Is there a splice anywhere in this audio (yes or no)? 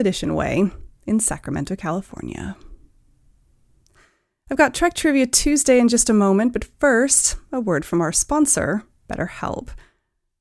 no